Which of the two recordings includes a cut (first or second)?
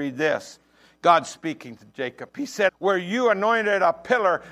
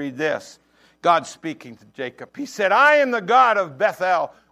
first